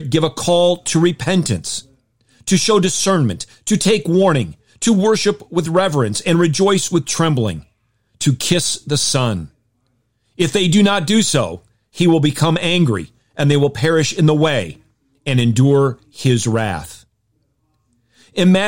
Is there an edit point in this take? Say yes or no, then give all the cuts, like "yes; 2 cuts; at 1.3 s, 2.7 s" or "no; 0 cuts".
no; 0 cuts